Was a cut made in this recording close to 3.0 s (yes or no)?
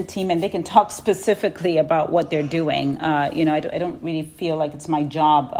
no